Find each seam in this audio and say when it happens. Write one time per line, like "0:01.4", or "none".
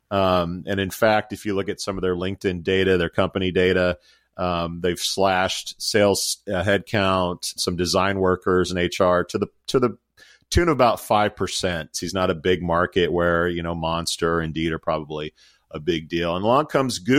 0:07.6
0:11.9